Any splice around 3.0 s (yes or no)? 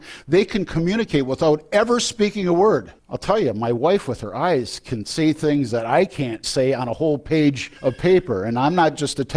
yes